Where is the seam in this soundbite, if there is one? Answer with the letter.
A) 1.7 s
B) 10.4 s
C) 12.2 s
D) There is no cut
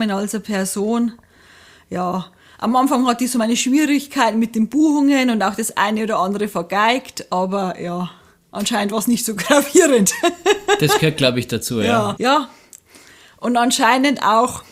C